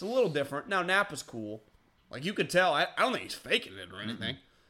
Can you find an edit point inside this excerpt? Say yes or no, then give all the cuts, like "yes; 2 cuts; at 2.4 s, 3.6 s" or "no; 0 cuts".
yes; 1 cut; at 2.0 s